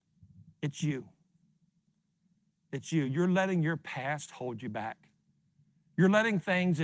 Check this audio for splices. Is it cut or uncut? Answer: uncut